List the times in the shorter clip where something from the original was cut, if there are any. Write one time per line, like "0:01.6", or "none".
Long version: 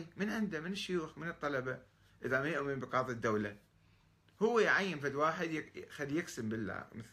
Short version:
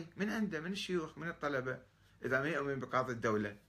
none